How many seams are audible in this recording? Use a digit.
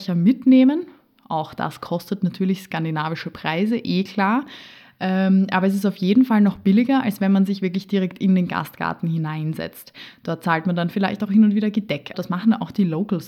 1